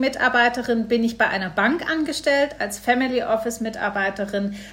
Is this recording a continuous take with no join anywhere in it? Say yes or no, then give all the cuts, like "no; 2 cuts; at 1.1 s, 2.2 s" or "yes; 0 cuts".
yes; 0 cuts